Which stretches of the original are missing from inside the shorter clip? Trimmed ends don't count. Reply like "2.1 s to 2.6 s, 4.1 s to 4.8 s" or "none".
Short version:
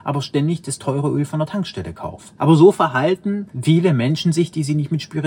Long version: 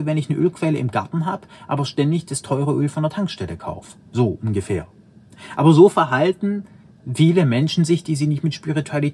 4.0 s to 5.5 s, 6.7 s to 7.0 s